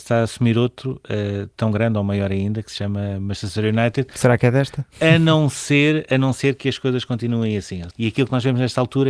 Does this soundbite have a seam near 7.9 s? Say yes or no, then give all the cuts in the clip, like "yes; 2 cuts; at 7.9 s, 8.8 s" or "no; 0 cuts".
yes; 1 cut; at 7.9 s